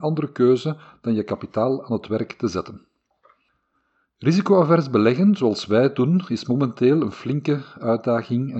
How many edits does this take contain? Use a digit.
0